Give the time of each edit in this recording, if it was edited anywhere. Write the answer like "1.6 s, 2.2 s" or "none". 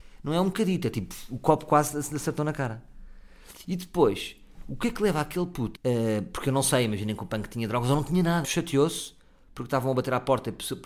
5.7 s, 8.4 s